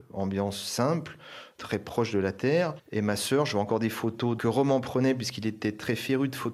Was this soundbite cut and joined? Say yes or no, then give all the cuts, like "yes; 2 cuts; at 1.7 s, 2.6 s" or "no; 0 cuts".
no; 0 cuts